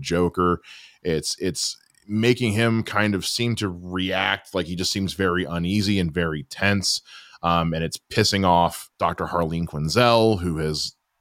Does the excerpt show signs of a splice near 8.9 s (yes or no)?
yes